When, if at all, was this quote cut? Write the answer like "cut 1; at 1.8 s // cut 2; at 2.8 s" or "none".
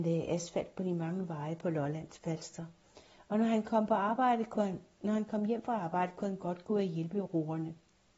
none